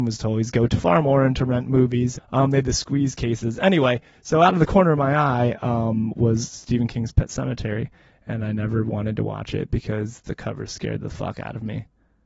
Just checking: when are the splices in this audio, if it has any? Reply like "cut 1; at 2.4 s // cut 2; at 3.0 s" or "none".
cut 1; at 2.1 s